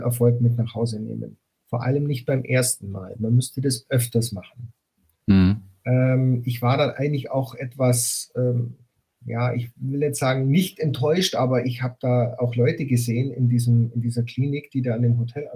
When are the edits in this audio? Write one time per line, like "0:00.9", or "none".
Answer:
none